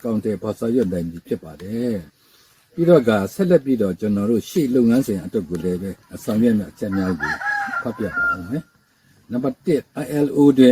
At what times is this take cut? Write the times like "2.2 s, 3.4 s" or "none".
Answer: 2.1 s, 6.0 s

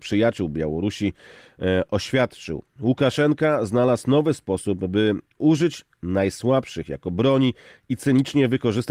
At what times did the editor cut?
none

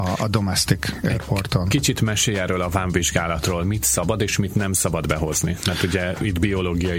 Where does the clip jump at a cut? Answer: none

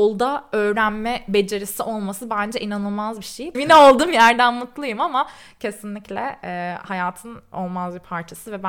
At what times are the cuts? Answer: 3.5 s

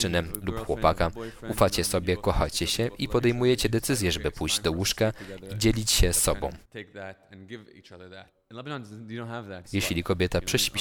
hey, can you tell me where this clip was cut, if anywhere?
6.6 s, 9.6 s

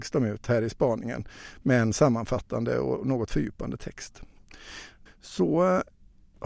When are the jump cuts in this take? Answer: 5.1 s

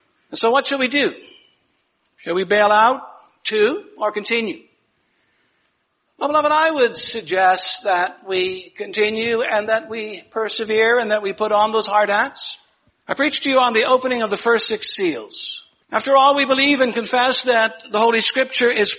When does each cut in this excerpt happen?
12.9 s, 15.8 s

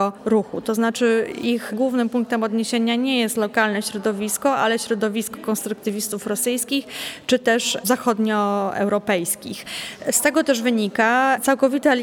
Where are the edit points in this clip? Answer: none

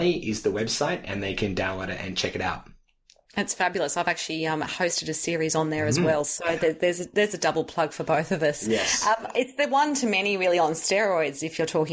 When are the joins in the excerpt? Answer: none

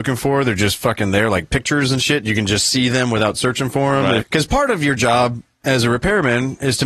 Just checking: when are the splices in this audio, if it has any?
4.2 s

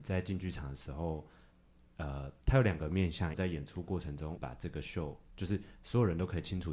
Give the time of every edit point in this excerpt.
3.3 s, 4.4 s

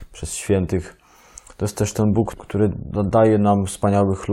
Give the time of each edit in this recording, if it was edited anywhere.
2.3 s

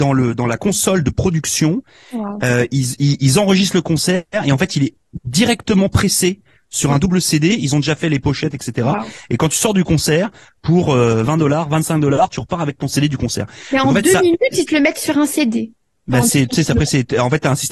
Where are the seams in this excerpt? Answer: none

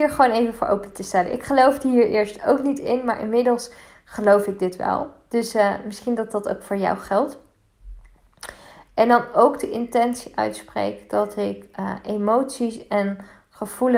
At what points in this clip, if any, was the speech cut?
8.9 s

